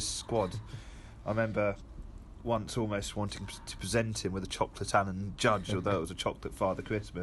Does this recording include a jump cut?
no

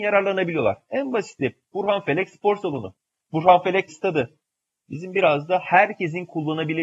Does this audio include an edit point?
yes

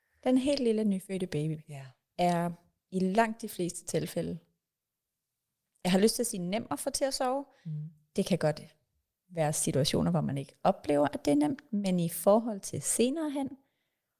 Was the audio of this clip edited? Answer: no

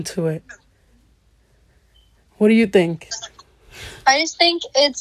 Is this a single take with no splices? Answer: yes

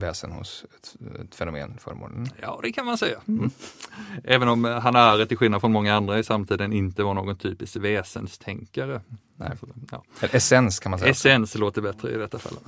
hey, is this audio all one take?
yes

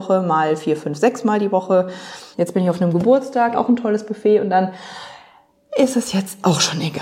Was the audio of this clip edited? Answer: yes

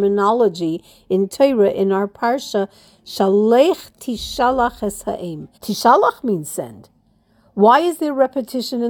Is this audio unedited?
no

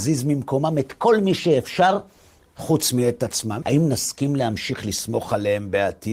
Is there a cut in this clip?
yes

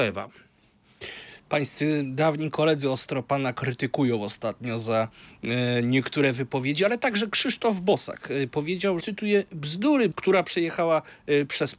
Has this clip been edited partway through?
yes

